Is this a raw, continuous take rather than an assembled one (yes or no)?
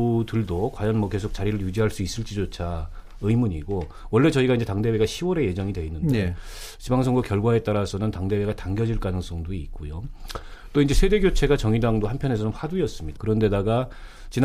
no